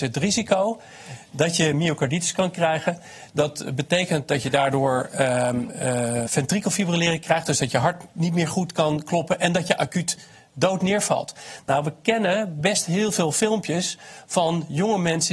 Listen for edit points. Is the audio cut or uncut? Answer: cut